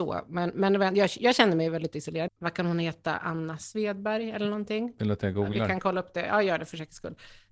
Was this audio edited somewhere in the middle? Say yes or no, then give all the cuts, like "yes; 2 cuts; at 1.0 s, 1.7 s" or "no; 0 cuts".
yes; 1 cut; at 2.3 s